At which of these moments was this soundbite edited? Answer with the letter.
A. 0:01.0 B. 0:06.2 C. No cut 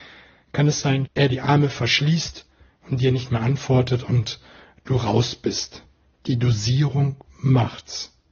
A